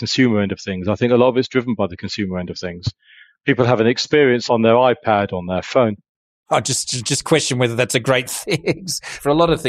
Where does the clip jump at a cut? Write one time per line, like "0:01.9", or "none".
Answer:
none